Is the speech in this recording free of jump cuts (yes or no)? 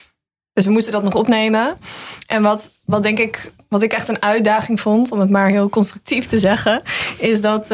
yes